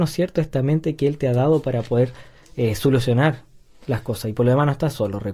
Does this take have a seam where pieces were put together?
no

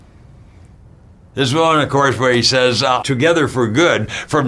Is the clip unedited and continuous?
no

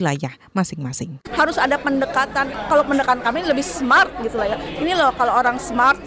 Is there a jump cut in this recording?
yes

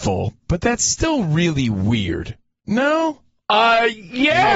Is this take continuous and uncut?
yes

